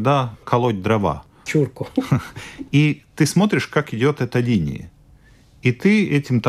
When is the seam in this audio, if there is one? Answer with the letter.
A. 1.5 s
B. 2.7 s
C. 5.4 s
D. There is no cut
A